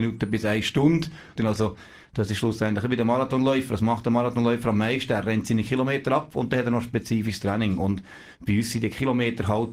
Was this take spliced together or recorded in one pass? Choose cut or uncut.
cut